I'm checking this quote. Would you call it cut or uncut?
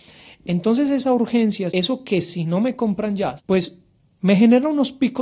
cut